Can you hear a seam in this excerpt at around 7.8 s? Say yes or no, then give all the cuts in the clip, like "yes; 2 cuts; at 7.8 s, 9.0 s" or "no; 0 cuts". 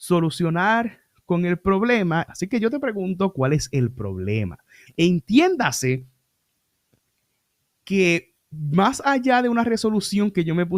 no; 2 cuts; at 2.3 s, 4.9 s